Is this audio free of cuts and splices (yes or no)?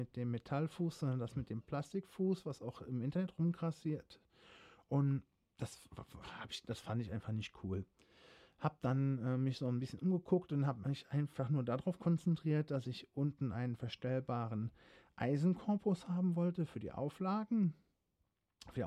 yes